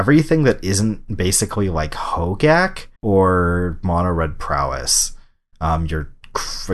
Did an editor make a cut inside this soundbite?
yes; 2 cuts; at 3.0 s, 5.5 s

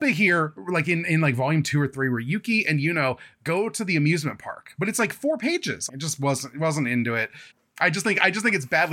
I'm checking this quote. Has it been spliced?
yes; 2 cuts; at 5.9 s, 7.5 s

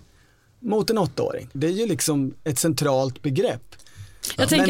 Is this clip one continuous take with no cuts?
no; 1 cut; at 1.5 s

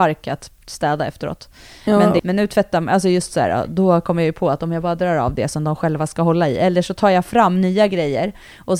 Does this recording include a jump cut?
yes; 1 cut; at 2.2 s

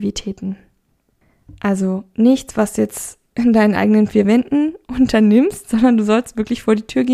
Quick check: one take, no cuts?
yes; 0 cuts

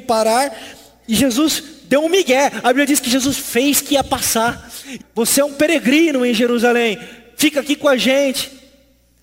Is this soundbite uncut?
no; 1 cut; at 5.0 s

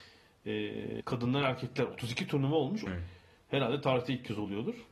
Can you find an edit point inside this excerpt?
yes; 2 cuts; at 1.0 s, 2.9 s

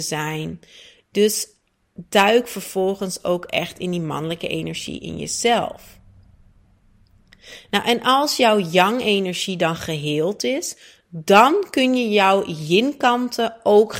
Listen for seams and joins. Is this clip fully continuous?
yes; 0 cuts

